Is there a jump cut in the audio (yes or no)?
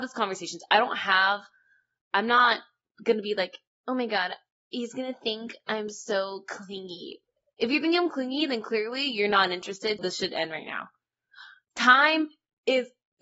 yes